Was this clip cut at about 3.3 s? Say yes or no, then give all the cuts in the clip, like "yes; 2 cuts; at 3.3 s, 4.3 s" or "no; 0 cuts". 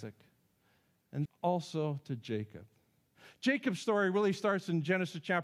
no; 1 cut; at 1.3 s